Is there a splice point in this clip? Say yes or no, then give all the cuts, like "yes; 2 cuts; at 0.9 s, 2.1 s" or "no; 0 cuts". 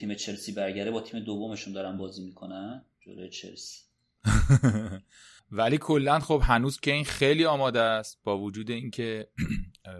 yes; 2 cuts; at 2.9 s, 5.4 s